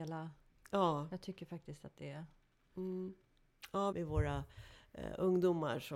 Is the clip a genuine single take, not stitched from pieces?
no; 1 cut; at 3.9 s

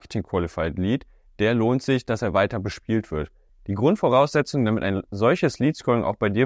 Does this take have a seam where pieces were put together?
yes; 1 cut; at 3.5 s

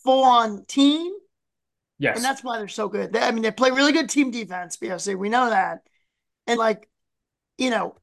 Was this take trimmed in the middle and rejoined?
yes; 1 cut; at 6.6 s

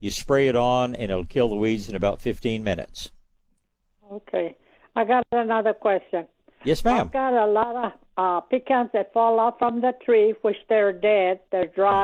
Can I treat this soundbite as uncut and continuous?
yes; 0 cuts

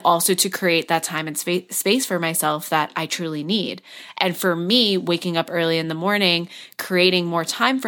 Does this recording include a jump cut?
no; 0 cuts

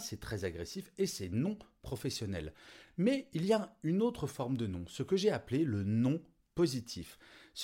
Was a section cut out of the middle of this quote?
no; 0 cuts

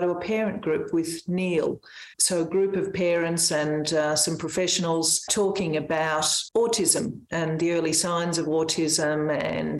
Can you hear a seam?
no; 0 cuts

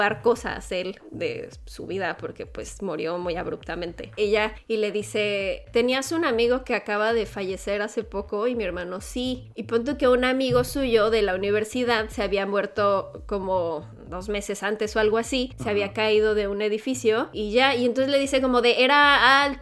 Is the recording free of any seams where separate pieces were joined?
no; 1 cut; at 4.2 s

